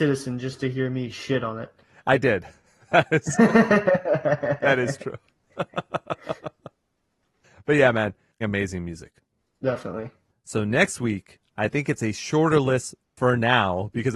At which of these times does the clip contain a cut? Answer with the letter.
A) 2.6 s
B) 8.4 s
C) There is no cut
B